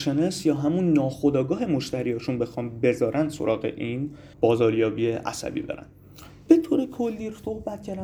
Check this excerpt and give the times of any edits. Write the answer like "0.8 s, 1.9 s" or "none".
4.3 s